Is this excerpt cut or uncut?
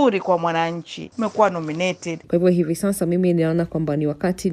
cut